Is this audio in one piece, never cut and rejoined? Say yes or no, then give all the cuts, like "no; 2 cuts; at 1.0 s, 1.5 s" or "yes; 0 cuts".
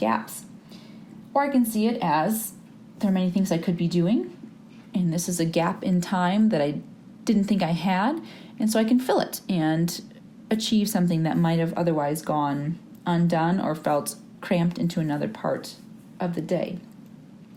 yes; 0 cuts